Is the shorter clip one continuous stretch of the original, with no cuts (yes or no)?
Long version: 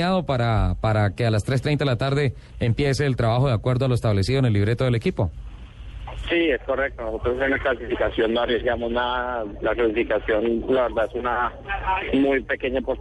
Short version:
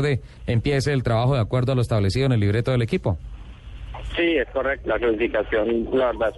no